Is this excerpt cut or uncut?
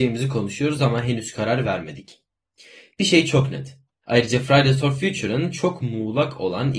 cut